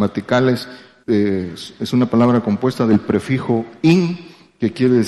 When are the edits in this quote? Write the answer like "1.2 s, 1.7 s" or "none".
1.0 s